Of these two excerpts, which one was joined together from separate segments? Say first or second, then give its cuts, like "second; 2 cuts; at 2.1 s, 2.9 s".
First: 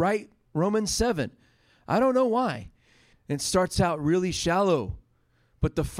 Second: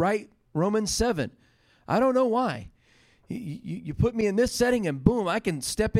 first; 1 cut; at 3.1 s